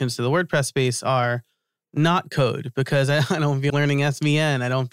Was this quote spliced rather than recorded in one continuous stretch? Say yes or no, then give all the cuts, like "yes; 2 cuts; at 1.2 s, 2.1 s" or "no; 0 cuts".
yes; 1 cut; at 3.7 s